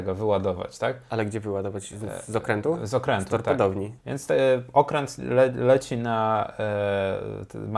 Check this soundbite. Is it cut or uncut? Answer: cut